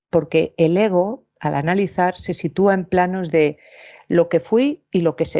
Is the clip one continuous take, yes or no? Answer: yes